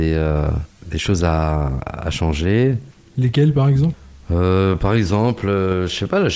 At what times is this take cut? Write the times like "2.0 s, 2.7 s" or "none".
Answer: none